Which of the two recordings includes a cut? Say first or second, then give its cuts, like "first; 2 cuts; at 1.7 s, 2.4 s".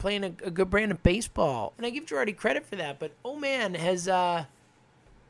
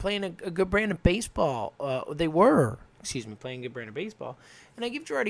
first; 1 cut; at 1.7 s